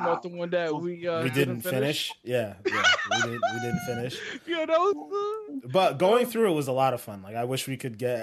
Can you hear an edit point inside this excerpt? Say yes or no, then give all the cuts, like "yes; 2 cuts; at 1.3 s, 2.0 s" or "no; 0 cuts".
no; 0 cuts